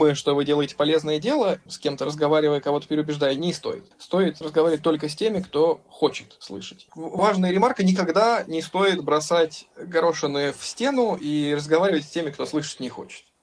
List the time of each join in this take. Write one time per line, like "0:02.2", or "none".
0:06.9